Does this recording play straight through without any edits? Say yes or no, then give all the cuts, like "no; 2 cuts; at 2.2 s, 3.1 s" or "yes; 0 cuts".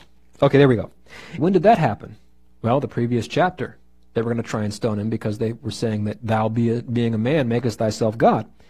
no; 1 cut; at 1.4 s